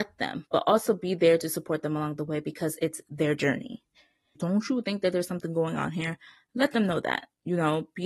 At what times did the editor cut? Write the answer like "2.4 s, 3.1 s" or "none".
4.4 s

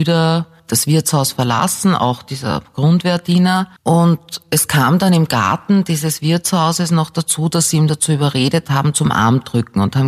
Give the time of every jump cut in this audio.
3.8 s

